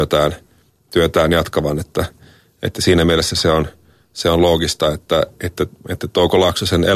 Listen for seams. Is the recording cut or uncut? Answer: uncut